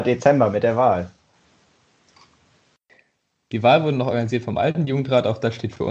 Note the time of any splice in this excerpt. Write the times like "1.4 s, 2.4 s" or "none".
none